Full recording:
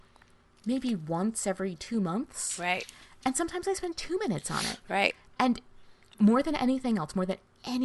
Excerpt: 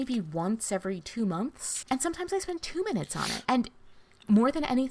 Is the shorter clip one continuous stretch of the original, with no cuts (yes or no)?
no